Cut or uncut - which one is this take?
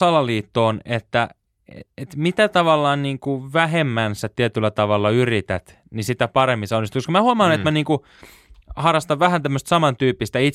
uncut